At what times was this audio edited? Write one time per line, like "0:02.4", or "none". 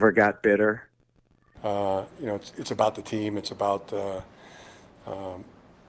0:01.6